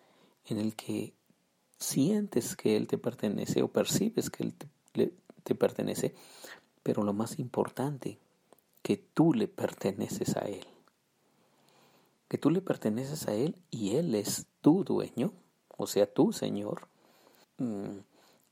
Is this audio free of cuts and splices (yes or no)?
no